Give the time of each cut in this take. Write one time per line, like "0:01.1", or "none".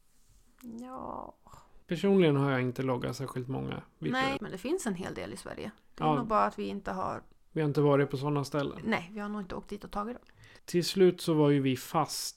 0:01.8
0:04.4
0:10.6